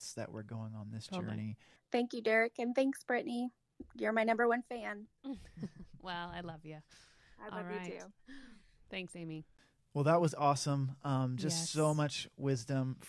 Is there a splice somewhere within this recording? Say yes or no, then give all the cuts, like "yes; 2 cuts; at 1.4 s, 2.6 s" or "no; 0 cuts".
yes; 1 cut; at 1.8 s